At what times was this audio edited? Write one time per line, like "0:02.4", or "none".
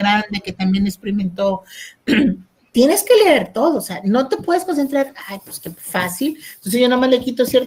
none